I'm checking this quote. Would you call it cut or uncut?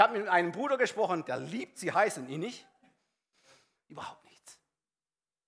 cut